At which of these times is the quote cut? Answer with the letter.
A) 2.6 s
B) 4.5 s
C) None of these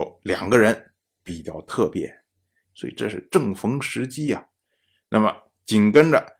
A